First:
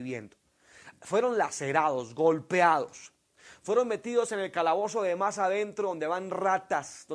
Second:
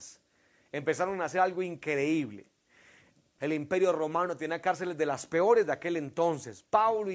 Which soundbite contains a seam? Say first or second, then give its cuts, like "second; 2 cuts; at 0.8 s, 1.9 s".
second; 1 cut; at 3.4 s